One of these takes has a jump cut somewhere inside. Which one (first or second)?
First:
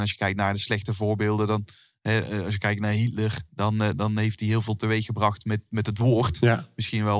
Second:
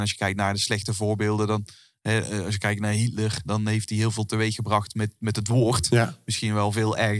second